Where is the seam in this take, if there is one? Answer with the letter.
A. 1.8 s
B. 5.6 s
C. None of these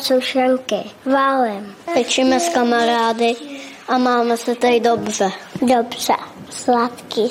B